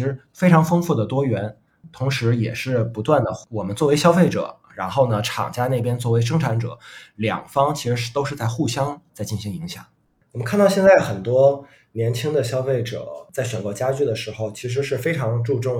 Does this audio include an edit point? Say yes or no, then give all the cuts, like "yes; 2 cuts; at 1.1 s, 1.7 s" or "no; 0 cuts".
no; 0 cuts